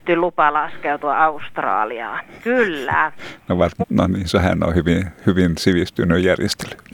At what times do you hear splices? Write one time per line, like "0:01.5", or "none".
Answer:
0:02.4
0:03.8